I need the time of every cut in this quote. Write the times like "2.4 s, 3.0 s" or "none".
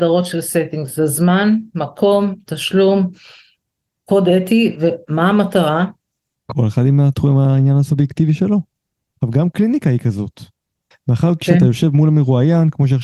6.3 s, 9.0 s, 10.9 s